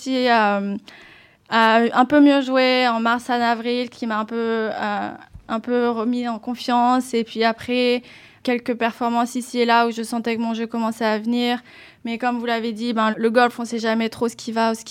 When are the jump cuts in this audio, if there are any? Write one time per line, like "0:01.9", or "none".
0:08.4
0:13.1